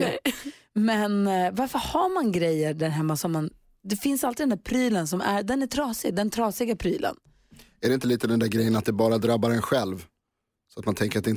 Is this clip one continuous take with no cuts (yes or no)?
yes